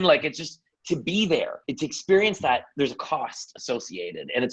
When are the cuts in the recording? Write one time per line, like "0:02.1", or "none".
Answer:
0:01.6